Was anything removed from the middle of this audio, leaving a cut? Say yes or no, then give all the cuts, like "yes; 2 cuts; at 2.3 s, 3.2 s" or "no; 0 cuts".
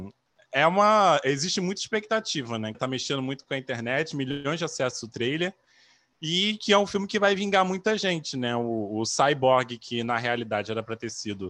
yes; 1 cut; at 2.7 s